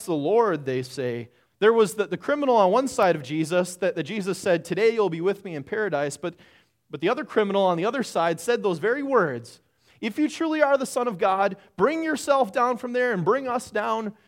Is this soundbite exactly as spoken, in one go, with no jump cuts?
no; 1 cut; at 1.5 s

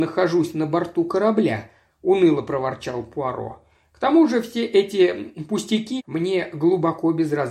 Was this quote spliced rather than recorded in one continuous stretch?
yes; 1 cut; at 6.0 s

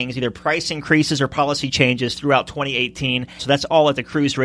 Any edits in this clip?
yes; 1 cut; at 3.4 s

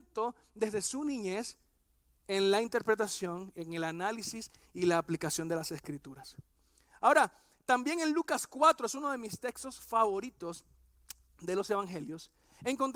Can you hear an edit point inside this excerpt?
no; 0 cuts

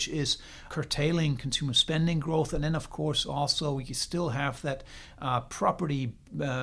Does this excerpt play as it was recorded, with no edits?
yes; 0 cuts

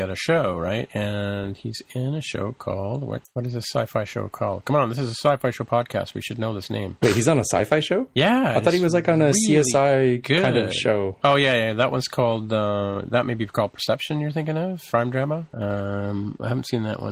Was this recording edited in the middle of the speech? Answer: no; 0 cuts

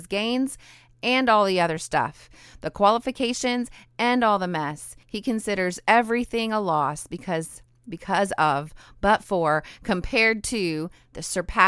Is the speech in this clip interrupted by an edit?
no; 0 cuts

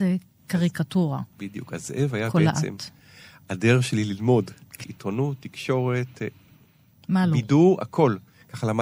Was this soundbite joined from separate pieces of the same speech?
yes; 1 cut; at 4.8 s

